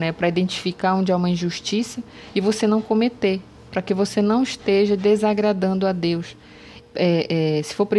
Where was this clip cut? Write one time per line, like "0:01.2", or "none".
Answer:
0:06.8